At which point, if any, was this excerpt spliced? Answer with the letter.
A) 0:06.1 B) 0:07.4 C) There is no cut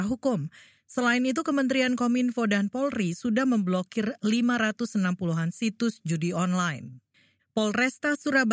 B